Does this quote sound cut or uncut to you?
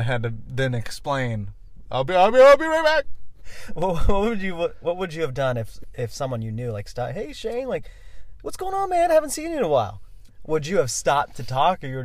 uncut